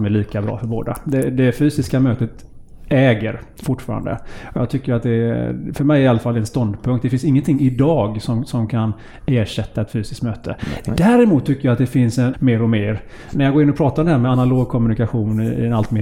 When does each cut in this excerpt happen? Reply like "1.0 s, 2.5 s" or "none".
12.3 s